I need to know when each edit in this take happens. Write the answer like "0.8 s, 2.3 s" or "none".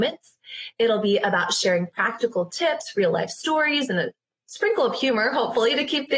none